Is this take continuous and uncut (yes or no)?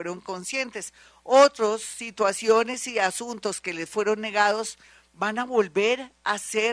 yes